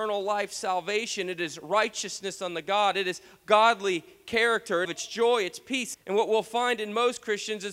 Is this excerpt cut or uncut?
cut